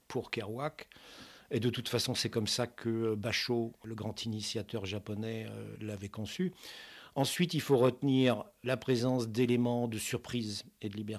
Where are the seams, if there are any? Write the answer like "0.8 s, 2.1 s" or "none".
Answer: none